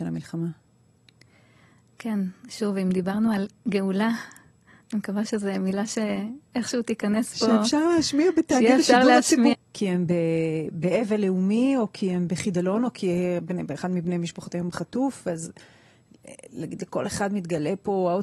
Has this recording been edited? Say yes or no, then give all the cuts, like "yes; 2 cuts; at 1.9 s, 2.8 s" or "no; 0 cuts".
yes; 1 cut; at 9.5 s